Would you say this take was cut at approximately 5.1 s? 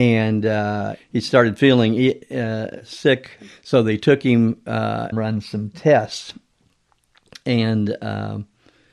yes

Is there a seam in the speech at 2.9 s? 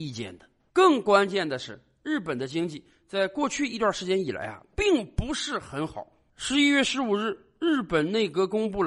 no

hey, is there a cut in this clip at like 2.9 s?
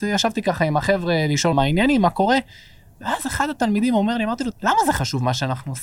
no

